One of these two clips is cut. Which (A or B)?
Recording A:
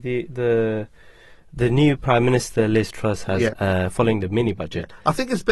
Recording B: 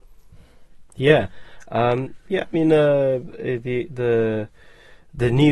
A